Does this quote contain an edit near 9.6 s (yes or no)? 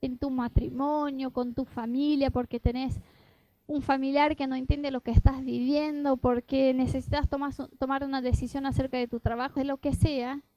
yes